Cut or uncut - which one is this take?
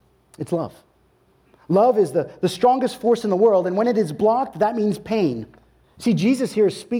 cut